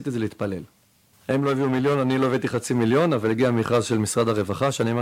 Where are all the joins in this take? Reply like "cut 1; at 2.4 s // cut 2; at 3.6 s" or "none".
cut 1; at 1.1 s